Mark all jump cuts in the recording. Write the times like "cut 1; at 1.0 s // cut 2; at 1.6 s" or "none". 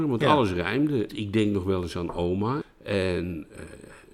cut 1; at 1.1 s // cut 2; at 2.6 s